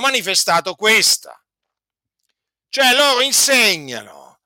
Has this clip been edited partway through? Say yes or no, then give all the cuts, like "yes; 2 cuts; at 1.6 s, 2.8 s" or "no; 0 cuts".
no; 0 cuts